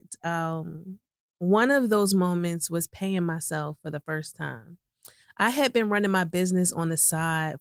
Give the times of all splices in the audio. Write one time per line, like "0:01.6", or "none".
none